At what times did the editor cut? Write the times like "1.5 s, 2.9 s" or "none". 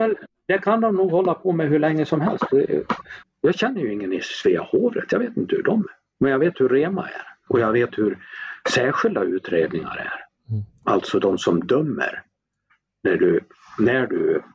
3.2 s, 6.2 s, 7.5 s